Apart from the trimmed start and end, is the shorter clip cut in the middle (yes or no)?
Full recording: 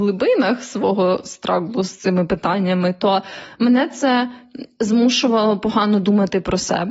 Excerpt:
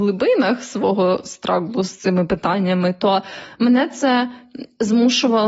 no